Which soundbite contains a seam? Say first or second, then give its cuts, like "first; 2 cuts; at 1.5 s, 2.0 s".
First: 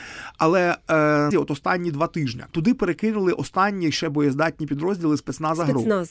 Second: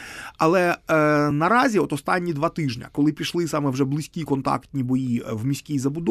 first; 2 cuts; at 1.3 s, 2.5 s